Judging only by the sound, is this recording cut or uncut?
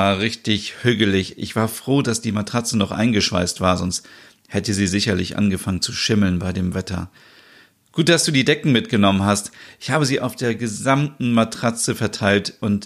uncut